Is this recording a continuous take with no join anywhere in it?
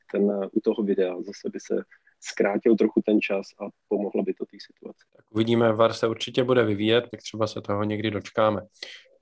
no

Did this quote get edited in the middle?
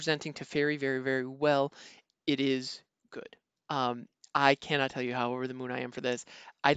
yes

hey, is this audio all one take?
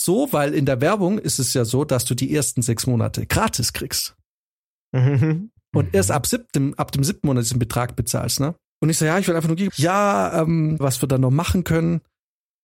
no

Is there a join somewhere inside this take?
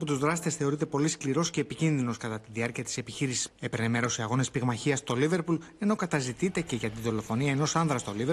yes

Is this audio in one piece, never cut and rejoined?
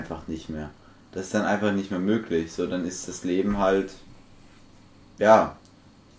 yes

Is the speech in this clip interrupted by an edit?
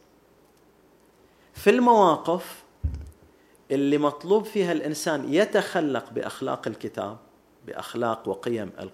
no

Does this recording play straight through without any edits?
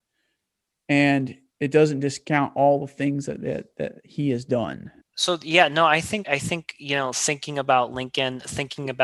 no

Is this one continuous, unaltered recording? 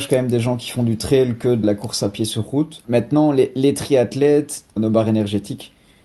no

